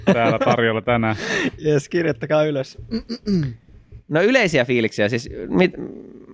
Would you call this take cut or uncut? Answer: uncut